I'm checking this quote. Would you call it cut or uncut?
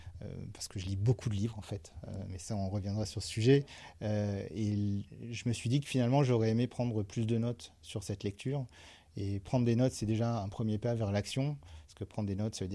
uncut